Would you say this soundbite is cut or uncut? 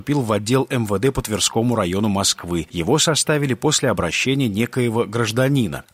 uncut